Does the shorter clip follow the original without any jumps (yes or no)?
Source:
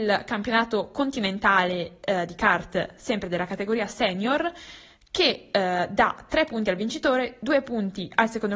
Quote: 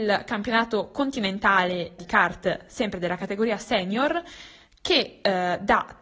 no